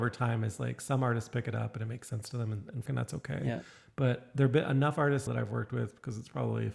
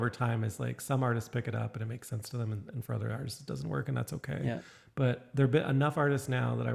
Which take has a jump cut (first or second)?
first